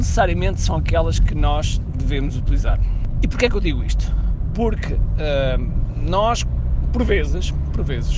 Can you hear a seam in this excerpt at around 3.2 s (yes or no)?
no